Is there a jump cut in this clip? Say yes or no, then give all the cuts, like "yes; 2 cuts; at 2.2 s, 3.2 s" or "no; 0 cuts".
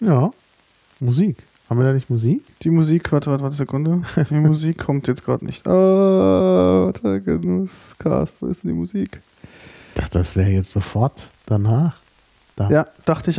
no; 0 cuts